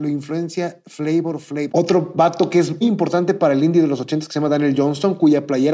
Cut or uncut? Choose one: cut